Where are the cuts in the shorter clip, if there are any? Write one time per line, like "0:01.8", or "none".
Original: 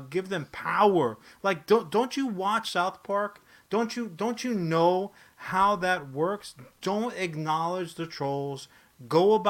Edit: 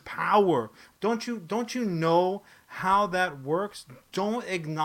0:00.9